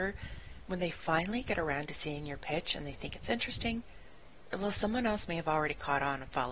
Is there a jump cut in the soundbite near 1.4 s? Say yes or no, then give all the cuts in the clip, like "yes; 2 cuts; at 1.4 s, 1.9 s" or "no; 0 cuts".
no; 0 cuts